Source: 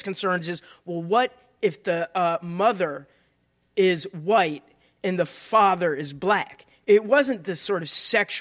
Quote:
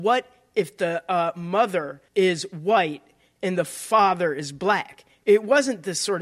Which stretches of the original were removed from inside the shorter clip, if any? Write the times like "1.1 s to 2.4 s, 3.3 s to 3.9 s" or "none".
3.1 s to 3.7 s